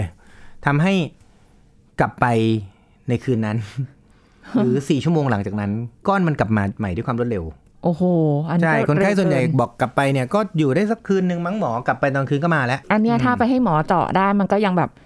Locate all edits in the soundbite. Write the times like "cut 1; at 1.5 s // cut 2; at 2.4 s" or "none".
cut 1; at 6.0 s // cut 2; at 12.8 s